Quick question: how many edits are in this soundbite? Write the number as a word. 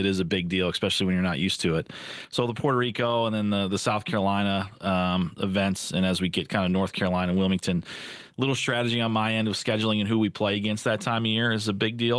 one